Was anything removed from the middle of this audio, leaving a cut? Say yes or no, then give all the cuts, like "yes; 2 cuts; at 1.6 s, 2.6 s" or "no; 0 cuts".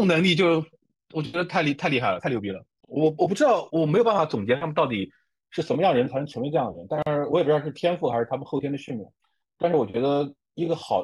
yes; 1 cut; at 3.7 s